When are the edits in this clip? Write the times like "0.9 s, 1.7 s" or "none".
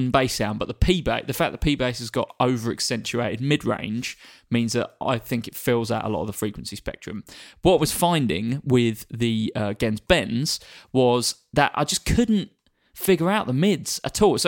none